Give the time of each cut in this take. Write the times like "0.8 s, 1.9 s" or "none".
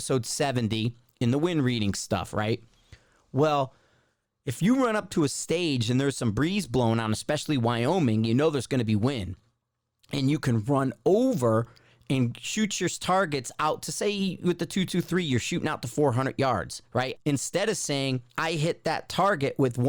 17.1 s, 18.3 s